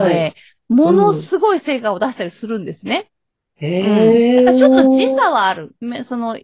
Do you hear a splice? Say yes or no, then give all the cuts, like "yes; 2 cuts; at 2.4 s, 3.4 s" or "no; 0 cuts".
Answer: no; 0 cuts